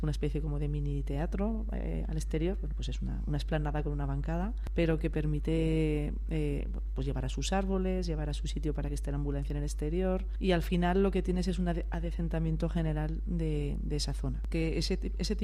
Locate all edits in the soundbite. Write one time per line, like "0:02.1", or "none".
none